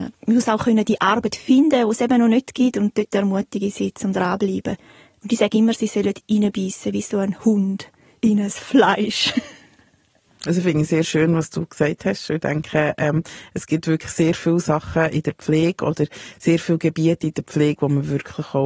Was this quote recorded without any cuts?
yes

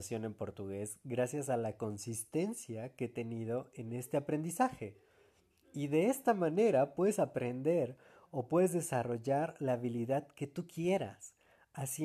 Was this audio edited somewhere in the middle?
no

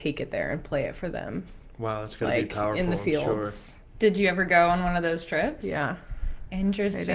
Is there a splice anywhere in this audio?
no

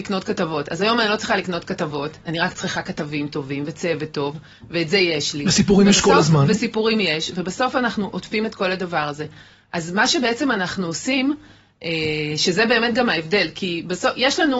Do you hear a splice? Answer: no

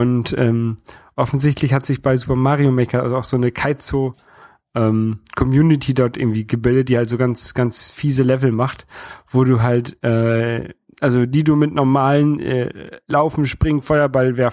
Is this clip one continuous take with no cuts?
yes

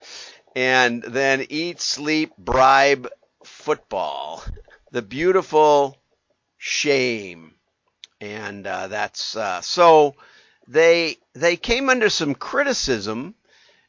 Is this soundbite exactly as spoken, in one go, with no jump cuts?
no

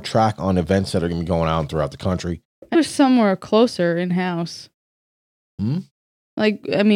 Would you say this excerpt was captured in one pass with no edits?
no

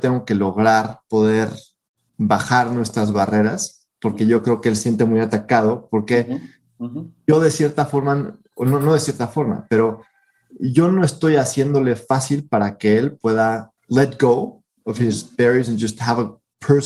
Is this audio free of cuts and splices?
no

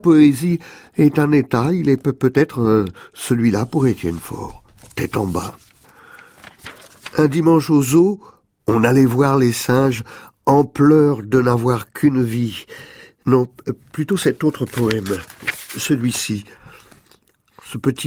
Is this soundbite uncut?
no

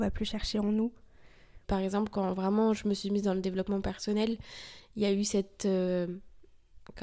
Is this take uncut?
no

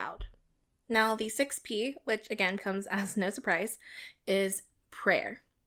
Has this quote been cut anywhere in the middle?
yes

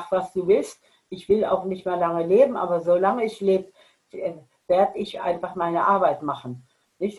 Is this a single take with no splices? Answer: yes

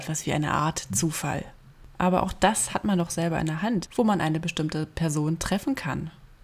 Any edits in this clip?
yes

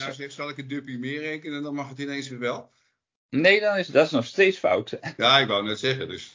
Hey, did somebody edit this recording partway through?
no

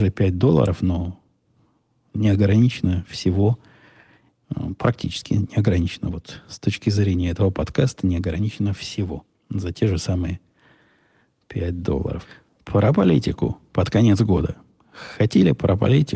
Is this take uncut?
yes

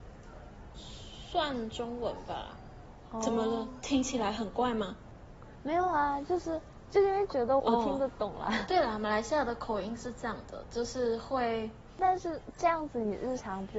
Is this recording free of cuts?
no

